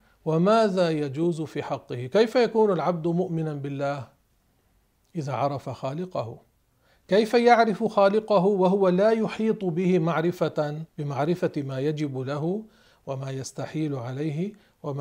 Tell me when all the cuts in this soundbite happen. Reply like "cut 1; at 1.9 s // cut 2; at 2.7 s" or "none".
cut 1; at 10.9 s